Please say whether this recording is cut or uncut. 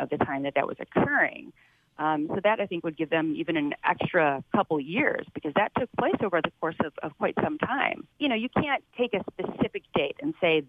uncut